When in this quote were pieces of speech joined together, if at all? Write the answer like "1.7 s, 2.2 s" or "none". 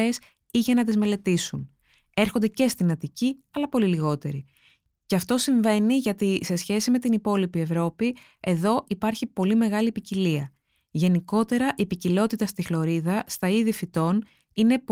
none